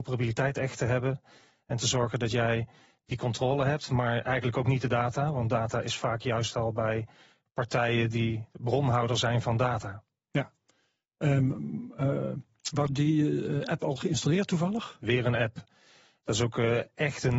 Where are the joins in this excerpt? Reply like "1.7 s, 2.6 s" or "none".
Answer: 12.9 s, 15.0 s